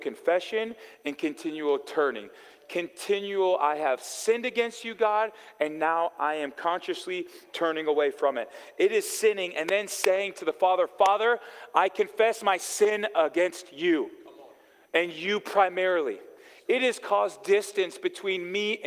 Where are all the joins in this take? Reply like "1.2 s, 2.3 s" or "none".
none